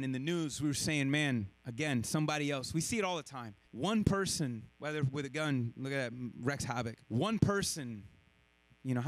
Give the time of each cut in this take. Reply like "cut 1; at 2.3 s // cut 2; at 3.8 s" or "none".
cut 1; at 3.6 s // cut 2; at 7.0 s